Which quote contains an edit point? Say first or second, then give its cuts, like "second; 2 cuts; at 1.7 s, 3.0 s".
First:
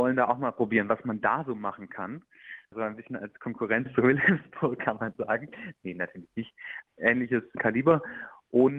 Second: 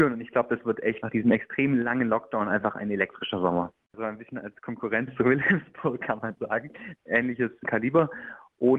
second; 2 cuts; at 3.9 s, 7.0 s